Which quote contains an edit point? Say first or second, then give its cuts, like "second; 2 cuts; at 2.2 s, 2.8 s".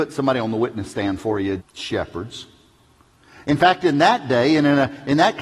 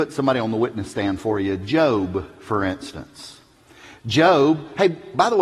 first; 1 cut; at 1.6 s